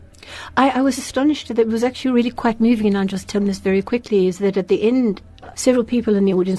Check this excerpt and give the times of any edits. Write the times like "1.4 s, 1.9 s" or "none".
1.0 s, 5.5 s